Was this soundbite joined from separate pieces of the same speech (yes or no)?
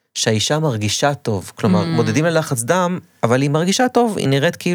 no